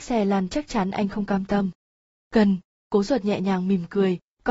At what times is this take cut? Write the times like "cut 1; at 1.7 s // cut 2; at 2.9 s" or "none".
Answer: none